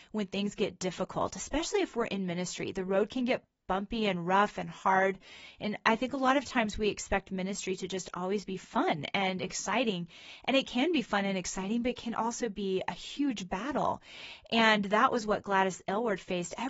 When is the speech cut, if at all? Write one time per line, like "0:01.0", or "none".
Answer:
none